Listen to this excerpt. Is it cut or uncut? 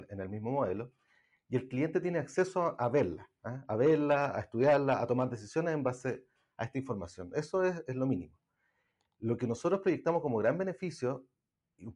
uncut